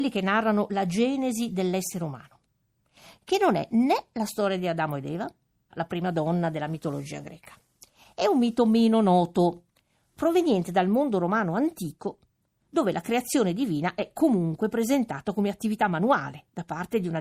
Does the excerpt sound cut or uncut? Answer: cut